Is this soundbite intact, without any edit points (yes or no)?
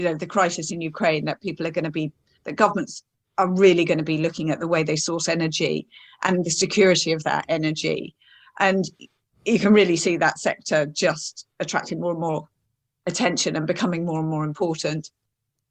yes